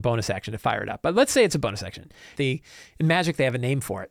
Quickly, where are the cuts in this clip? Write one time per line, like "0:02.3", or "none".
0:02.3